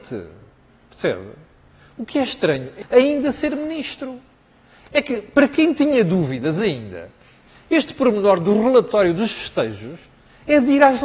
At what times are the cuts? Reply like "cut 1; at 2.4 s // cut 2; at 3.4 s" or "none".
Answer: cut 1; at 2.8 s